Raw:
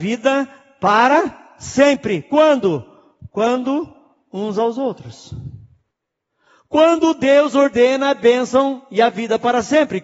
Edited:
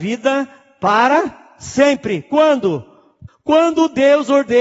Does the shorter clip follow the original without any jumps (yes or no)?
no